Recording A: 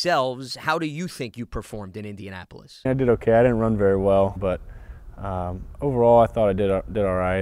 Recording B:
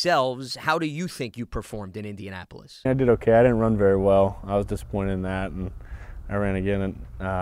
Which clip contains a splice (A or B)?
A